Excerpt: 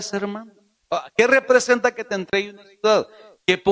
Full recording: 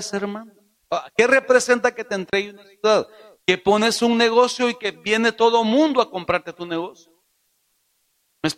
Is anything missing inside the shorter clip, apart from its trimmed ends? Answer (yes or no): no